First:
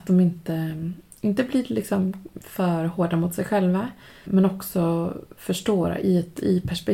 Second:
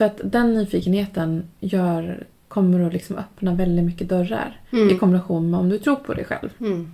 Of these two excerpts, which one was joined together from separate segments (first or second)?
first